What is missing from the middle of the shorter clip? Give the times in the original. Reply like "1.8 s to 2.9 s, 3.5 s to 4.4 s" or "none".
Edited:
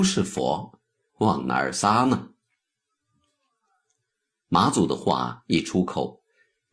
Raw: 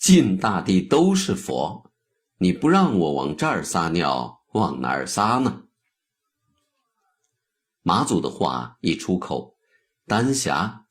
2.2 s to 4.4 s